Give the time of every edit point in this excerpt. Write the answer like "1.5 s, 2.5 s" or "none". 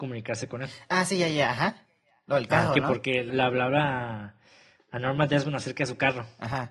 3.3 s